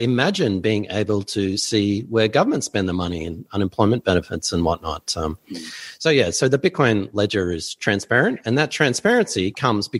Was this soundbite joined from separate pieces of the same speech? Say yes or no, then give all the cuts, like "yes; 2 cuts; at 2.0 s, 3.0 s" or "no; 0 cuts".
no; 0 cuts